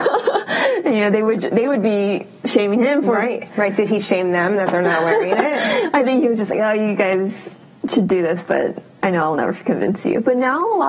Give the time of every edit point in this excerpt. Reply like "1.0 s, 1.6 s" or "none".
3.5 s